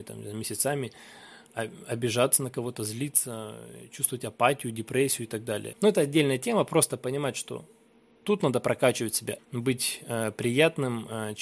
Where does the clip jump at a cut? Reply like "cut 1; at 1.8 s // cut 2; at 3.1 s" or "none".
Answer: cut 1; at 5.7 s // cut 2; at 9.4 s